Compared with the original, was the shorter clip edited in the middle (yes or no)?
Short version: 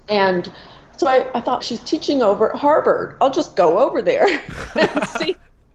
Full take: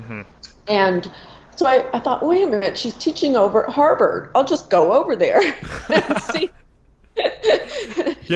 yes